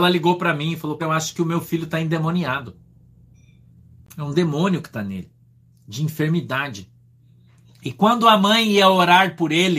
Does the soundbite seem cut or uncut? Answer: cut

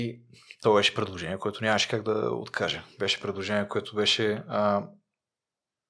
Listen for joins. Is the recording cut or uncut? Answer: uncut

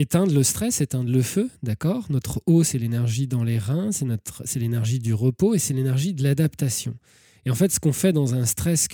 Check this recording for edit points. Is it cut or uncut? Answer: uncut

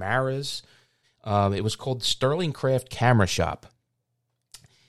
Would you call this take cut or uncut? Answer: cut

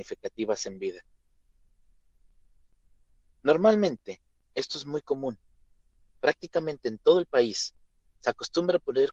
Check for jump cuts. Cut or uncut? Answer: uncut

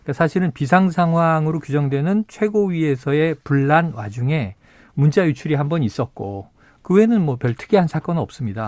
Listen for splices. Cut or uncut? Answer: uncut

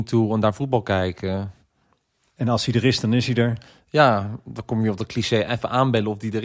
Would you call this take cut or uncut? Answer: uncut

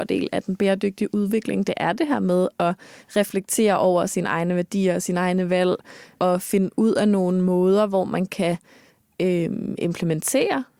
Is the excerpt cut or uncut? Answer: uncut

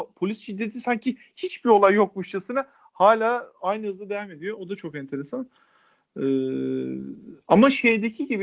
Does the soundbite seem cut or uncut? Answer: uncut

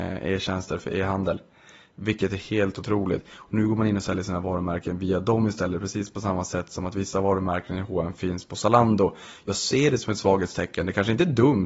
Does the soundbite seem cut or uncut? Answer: uncut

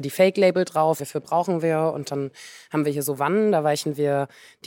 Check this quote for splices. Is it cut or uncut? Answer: cut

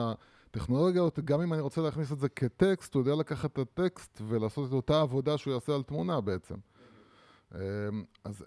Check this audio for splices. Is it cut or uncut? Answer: uncut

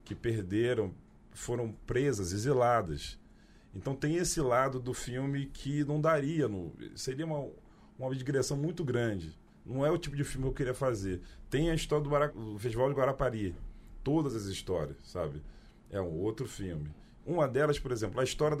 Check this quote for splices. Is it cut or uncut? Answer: cut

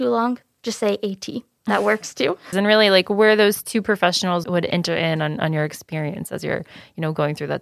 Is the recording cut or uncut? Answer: cut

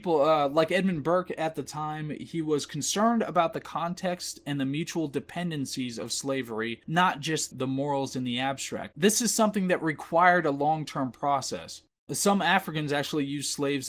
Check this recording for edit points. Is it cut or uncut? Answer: cut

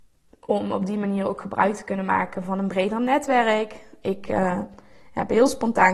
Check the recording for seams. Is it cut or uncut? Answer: uncut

